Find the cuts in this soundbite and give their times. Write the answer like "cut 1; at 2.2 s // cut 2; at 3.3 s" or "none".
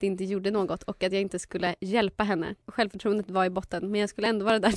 cut 1; at 2.6 s